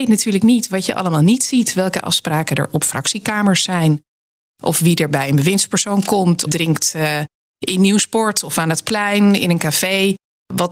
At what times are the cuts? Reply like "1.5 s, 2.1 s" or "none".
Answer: 6.5 s

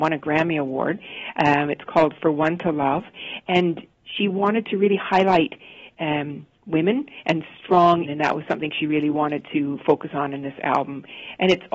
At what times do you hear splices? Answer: 8.0 s

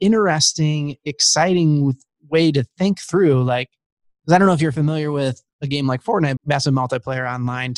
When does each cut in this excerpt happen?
6.4 s

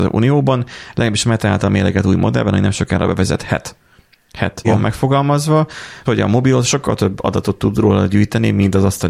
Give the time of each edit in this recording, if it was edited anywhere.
4.6 s, 6.1 s

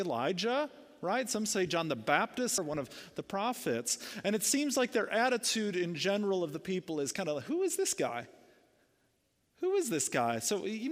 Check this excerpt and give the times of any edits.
2.6 s

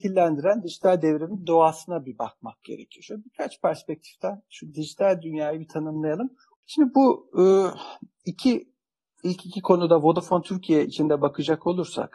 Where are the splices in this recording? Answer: 6.6 s

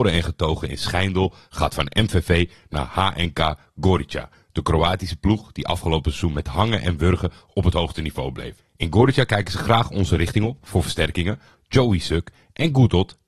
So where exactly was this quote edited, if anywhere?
11.6 s

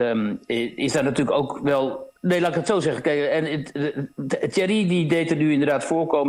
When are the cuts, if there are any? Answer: 2.2 s

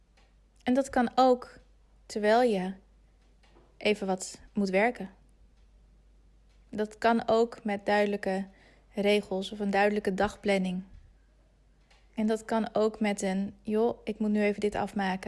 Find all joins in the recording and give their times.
none

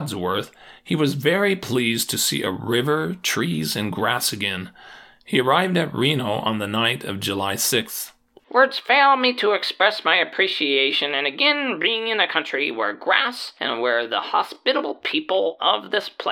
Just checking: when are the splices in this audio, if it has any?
none

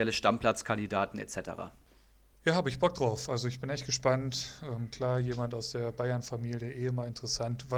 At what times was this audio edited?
none

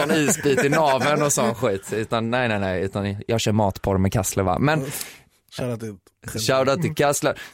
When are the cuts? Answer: none

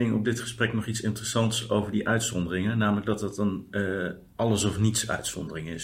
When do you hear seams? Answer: none

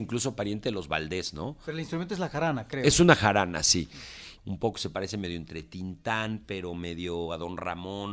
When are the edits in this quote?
1.6 s, 4.4 s

